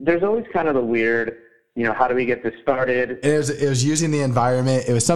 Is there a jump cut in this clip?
yes; 1 cut; at 3.2 s

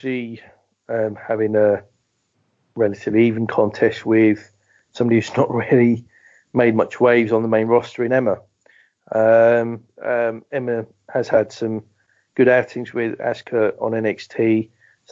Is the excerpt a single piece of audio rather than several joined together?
no; 1 cut; at 9.9 s

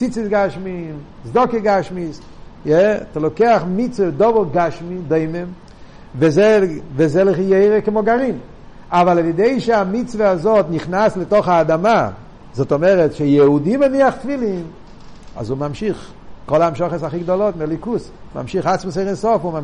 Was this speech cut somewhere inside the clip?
no; 0 cuts

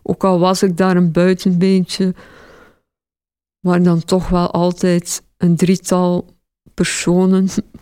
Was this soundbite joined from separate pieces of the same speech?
yes; 1 cut; at 3.8 s

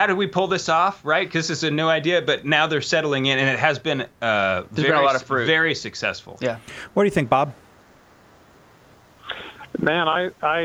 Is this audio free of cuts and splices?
yes; 0 cuts

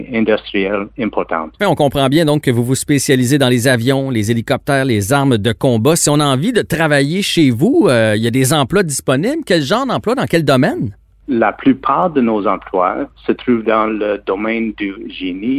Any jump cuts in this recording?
yes; 1 cut; at 1.6 s

